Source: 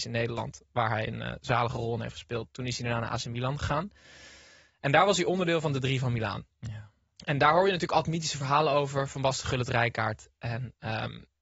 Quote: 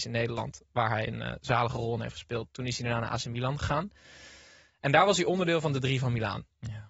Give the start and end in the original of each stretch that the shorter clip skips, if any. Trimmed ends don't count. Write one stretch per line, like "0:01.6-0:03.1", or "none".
none